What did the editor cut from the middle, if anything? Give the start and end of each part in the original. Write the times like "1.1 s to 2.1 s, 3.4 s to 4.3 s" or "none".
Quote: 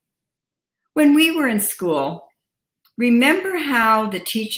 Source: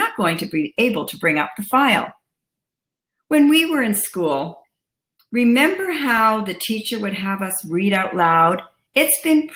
none